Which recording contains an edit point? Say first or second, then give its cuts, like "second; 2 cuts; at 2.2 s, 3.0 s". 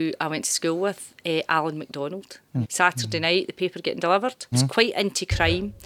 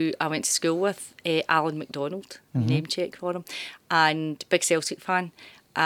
first; 2 cuts; at 2.6 s, 4.5 s